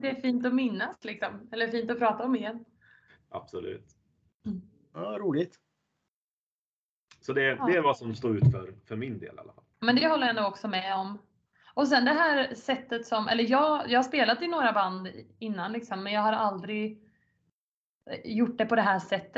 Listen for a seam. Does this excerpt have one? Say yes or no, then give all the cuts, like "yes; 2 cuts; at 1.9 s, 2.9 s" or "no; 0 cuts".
yes; 1 cut; at 9.7 s